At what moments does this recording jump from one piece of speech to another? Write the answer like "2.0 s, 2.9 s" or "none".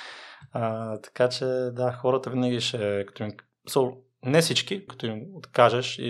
4.9 s